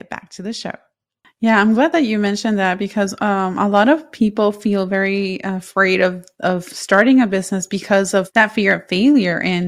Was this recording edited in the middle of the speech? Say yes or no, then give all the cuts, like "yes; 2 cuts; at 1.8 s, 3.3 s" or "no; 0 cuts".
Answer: no; 0 cuts